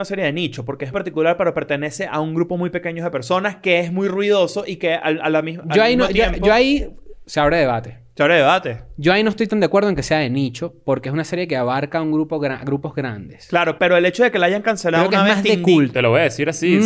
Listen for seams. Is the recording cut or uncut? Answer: cut